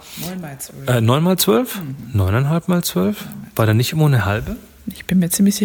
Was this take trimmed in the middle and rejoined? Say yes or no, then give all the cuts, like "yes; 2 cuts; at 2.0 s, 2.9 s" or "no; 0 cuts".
no; 0 cuts